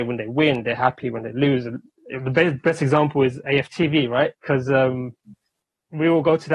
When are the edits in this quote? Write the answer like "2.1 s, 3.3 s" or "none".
4.3 s